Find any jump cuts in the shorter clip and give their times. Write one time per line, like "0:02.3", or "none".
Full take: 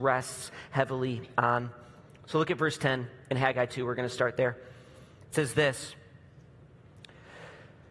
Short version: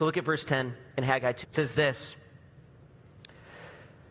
0:01.4